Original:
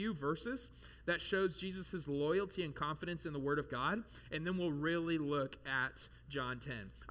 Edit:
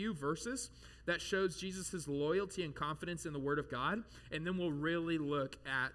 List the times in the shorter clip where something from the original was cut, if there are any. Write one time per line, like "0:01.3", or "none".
none